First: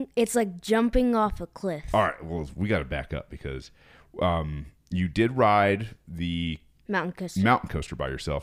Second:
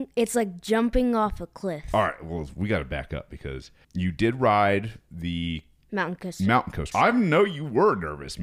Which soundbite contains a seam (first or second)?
second